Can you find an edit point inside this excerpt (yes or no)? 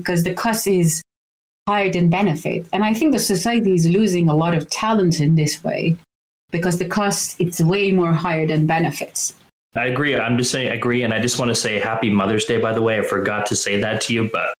no